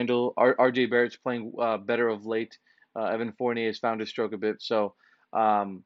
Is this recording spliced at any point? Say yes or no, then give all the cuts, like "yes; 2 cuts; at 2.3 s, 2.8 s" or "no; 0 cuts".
no; 0 cuts